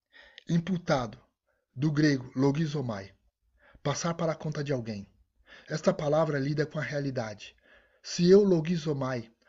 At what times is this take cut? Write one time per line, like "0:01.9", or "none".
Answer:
none